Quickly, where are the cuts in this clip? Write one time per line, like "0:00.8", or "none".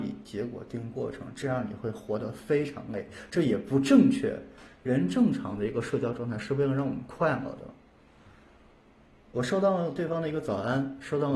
none